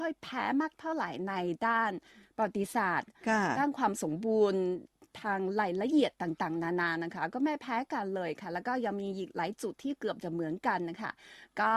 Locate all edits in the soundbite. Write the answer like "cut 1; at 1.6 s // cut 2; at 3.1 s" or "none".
none